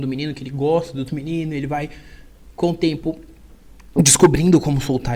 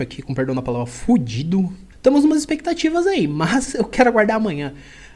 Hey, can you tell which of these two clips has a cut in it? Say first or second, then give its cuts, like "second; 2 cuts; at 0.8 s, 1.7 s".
second; 1 cut; at 1.9 s